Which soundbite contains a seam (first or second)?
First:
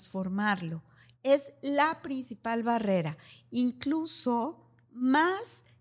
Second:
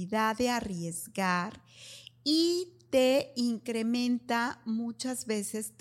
first